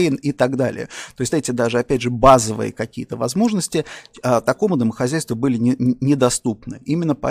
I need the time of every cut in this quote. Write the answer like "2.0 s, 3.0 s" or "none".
1.3 s